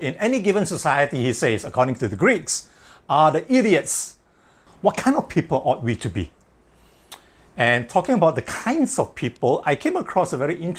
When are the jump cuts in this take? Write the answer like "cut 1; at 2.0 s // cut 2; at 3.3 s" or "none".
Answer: cut 1; at 4.7 s